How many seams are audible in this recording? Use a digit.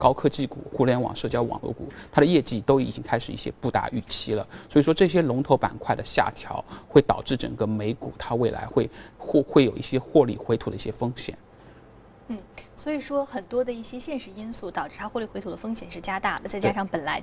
0